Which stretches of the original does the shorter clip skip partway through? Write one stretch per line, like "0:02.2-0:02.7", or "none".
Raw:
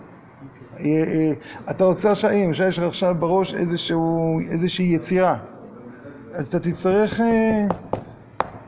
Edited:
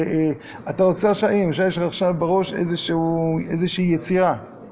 none